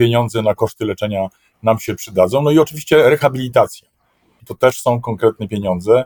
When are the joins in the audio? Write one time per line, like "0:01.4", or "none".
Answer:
0:04.4